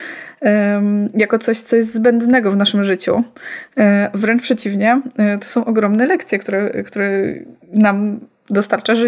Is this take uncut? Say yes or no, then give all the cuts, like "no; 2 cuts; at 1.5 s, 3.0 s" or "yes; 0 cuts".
yes; 0 cuts